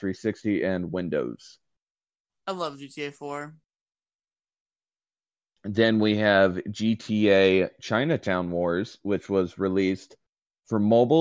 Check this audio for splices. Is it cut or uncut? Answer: uncut